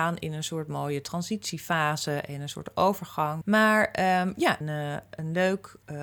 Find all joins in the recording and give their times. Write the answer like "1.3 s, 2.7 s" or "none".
3.4 s, 4.6 s